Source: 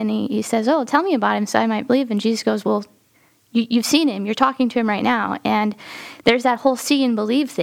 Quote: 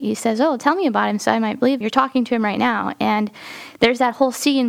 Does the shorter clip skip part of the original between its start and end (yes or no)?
yes